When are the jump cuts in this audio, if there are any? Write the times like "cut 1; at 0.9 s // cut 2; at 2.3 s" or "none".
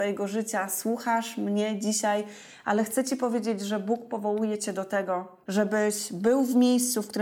cut 1; at 5.4 s

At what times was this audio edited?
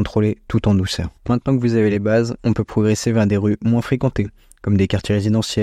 none

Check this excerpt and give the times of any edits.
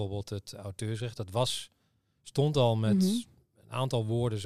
none

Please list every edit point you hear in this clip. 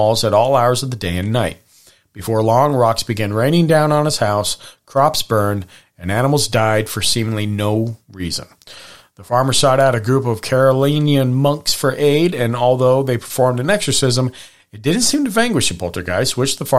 none

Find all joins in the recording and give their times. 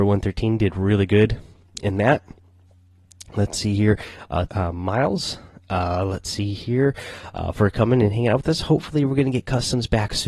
cut 1; at 4.5 s

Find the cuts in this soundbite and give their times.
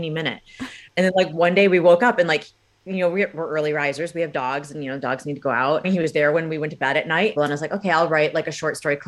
cut 1; at 5.8 s // cut 2; at 7.3 s

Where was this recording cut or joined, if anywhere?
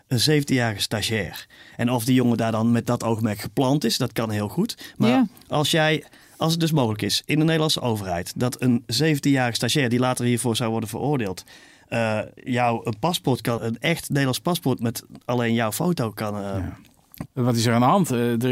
cut 1; at 13.6 s // cut 2; at 17.3 s

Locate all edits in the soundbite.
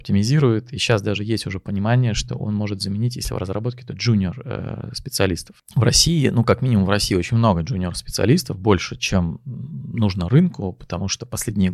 none

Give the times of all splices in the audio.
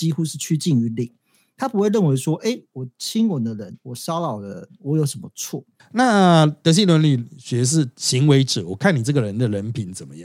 cut 1; at 5.8 s

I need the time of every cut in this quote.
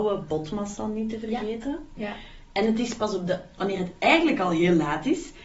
cut 1; at 2.0 s // cut 2; at 3.6 s

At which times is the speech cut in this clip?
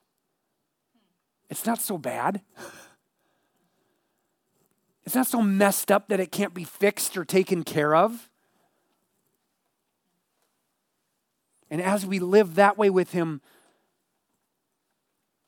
none

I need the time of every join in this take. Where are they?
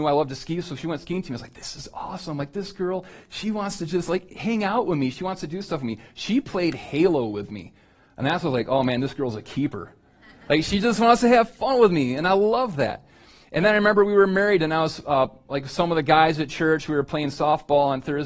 none

